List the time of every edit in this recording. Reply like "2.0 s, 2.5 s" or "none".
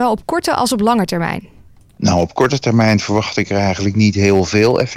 none